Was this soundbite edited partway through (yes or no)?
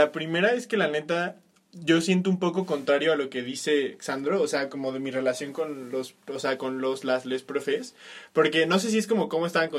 no